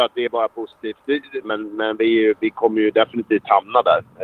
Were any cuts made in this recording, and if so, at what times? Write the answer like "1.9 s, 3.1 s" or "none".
1.4 s